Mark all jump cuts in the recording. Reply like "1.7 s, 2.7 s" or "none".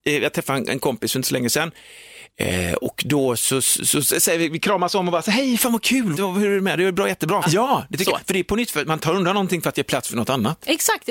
6.1 s, 7.4 s